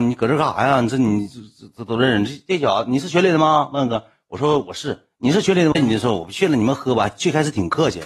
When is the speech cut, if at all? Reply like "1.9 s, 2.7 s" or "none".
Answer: 5.7 s